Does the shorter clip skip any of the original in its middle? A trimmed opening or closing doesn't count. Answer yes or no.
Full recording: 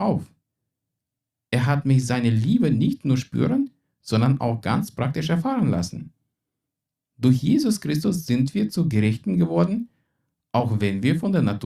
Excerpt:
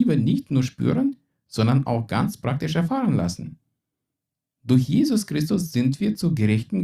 no